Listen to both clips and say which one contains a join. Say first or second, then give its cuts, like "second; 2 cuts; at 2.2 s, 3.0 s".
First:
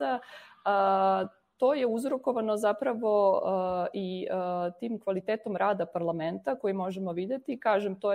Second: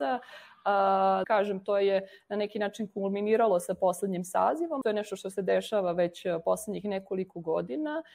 second; 2 cuts; at 1.2 s, 4.8 s